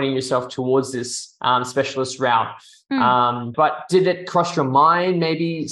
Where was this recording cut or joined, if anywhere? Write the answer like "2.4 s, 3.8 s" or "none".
3.5 s